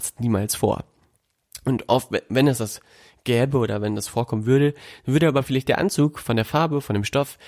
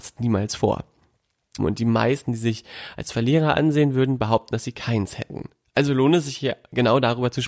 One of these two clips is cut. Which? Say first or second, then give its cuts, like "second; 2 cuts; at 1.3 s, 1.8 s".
second; 1 cut; at 1.6 s